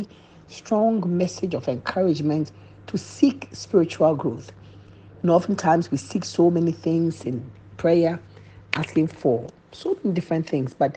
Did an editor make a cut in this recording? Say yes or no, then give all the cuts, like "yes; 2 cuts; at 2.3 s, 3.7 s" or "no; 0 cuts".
no; 0 cuts